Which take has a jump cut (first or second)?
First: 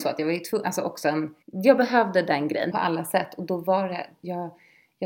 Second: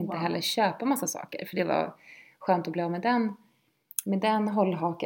first